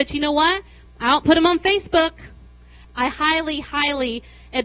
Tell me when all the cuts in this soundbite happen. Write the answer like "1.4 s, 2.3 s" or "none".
2.8 s